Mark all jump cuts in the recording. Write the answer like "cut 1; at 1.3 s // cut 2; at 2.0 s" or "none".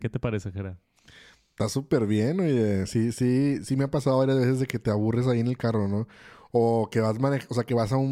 none

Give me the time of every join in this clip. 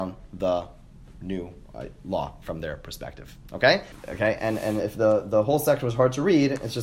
cut 1; at 3.9 s

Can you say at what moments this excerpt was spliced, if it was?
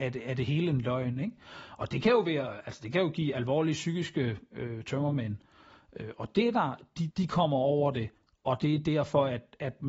cut 1; at 7.1 s

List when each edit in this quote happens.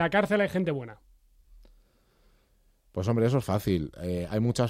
none

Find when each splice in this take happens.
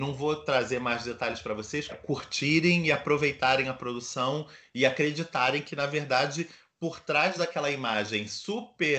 cut 1; at 1.9 s

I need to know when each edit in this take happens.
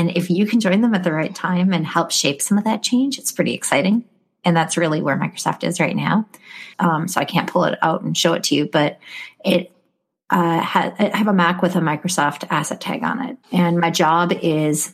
cut 1; at 6.7 s // cut 2; at 13.4 s

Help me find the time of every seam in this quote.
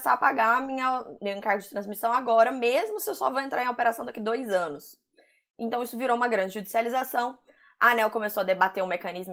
cut 1; at 1.2 s

